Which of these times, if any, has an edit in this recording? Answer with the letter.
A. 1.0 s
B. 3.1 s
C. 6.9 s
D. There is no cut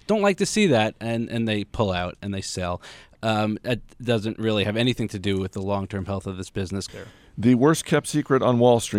C